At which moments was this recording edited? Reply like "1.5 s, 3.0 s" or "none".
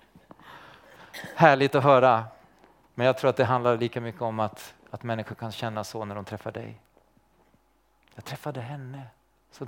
none